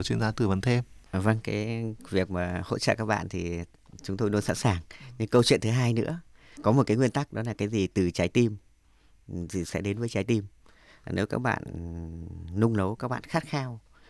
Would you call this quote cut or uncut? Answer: uncut